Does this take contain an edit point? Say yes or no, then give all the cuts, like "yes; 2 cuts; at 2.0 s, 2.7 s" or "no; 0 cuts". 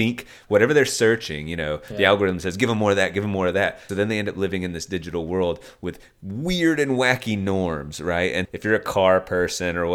yes; 2 cuts; at 3.9 s, 8.5 s